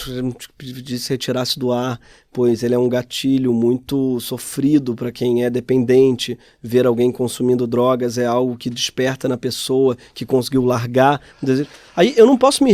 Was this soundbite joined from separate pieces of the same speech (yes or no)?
no